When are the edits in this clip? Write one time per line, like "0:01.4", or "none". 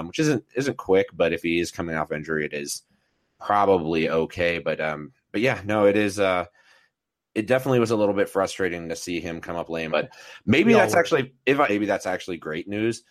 0:09.9
0:11.7